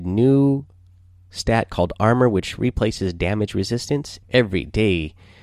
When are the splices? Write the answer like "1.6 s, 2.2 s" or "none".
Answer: 4.2 s